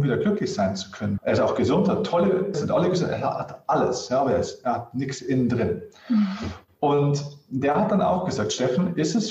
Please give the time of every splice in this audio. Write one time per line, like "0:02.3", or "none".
0:01.2
0:02.5

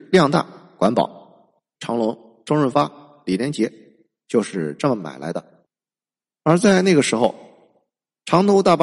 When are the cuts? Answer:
0:01.8

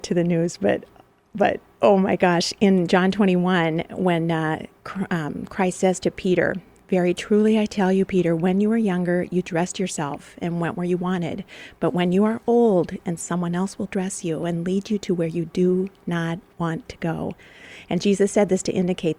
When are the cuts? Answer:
0:13.0

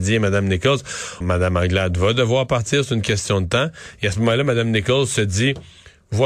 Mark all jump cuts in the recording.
0:01.2

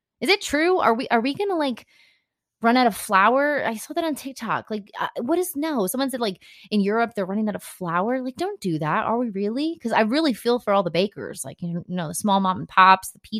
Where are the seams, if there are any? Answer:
none

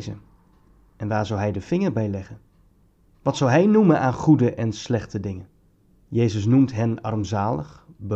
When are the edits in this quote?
0:03.1
0:06.1

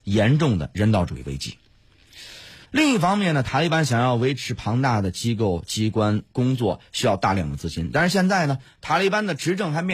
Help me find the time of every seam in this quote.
0:02.6

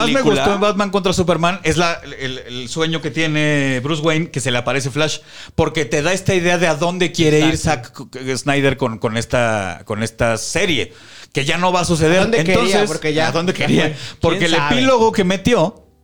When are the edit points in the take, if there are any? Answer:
none

